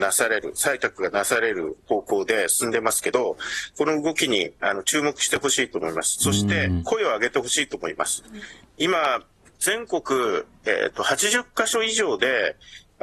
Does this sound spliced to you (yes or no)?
no